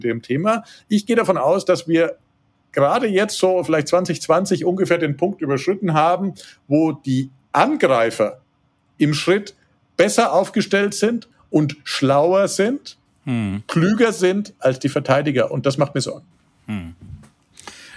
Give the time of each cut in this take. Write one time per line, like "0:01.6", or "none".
none